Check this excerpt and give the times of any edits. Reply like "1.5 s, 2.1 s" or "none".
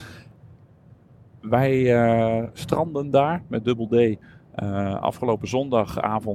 none